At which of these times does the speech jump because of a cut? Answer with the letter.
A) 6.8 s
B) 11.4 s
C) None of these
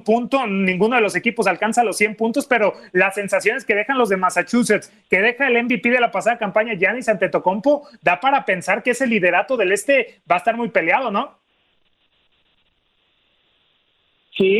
C